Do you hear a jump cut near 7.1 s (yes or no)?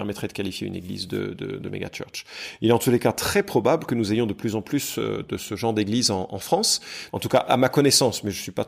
yes